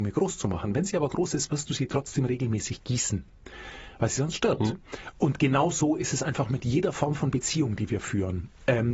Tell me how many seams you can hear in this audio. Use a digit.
0